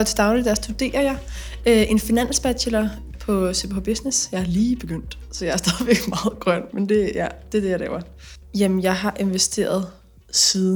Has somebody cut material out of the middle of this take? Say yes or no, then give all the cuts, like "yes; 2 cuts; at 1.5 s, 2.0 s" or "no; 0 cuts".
no; 0 cuts